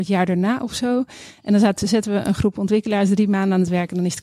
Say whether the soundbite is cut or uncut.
uncut